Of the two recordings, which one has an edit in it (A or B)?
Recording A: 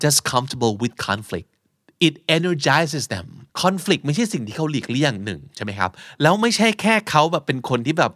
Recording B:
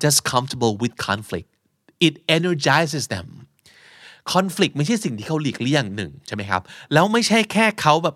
A